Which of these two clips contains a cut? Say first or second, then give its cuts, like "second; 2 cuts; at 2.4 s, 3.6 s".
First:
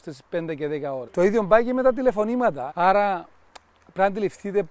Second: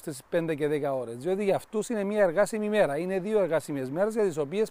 first; 2 cuts; at 1.1 s, 2.7 s